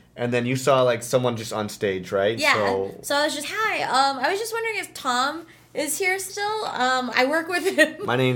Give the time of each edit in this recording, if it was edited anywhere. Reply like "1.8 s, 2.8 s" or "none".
3.4 s, 7.1 s